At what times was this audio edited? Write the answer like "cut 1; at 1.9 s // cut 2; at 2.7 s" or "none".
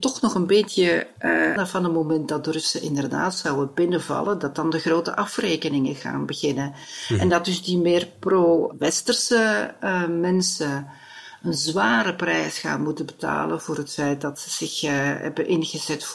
cut 1; at 1.6 s

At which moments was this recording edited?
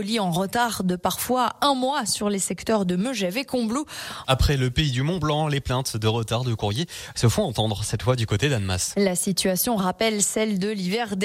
cut 1; at 4.2 s

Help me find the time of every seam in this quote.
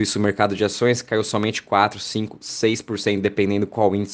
none

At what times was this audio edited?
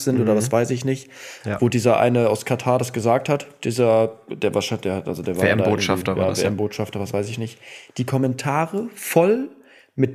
none

